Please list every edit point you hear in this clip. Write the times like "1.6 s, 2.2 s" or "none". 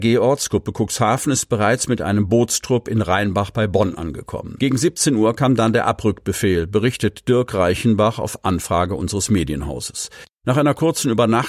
4.6 s, 10.2 s

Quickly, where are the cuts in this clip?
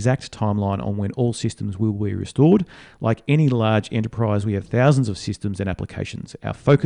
none

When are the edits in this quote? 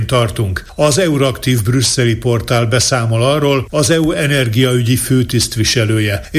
3.7 s

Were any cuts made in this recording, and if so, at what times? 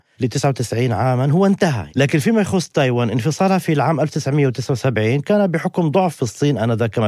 1.9 s

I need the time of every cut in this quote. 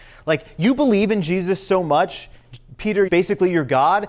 3.1 s

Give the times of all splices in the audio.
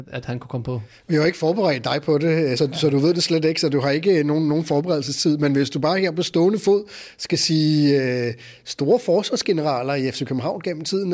2.6 s

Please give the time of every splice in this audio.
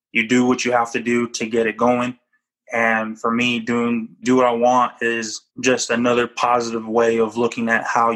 4.2 s, 5.5 s

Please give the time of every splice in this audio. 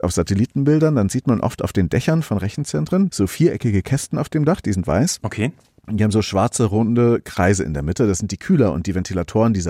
none

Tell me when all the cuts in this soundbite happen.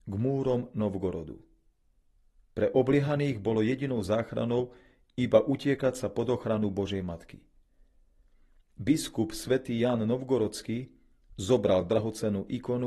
none

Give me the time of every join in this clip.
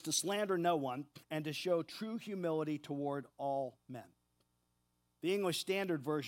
1.2 s

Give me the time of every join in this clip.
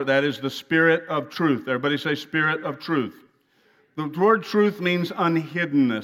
none

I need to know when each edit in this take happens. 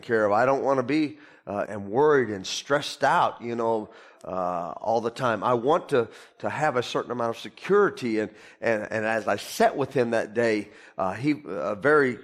1.7 s

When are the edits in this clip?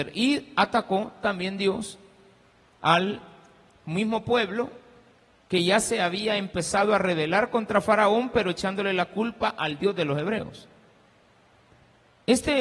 none

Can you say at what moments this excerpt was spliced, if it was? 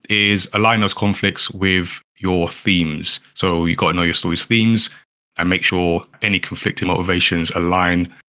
none

